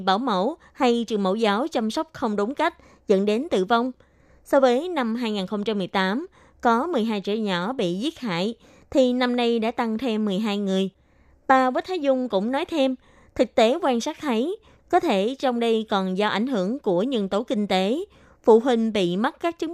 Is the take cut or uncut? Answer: cut